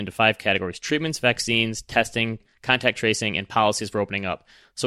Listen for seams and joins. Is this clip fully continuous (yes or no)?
yes